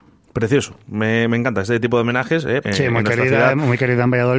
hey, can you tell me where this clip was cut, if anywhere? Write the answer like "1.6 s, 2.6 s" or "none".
2.6 s